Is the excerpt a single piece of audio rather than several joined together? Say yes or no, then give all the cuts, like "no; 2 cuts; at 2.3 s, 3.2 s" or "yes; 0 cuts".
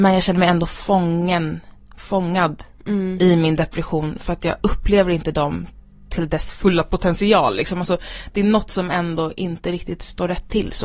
yes; 0 cuts